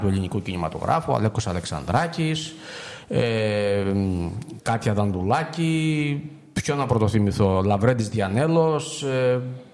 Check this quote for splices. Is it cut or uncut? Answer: uncut